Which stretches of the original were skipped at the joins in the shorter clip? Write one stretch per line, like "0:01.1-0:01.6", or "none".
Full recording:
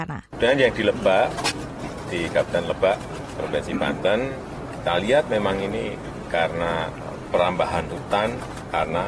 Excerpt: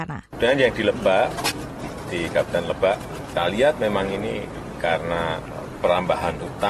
0:03.3-0:04.8